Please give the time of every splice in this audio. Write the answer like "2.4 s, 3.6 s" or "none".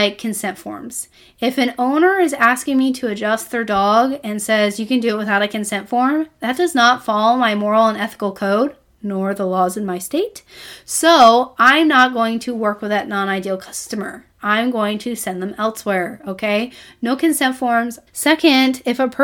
18.1 s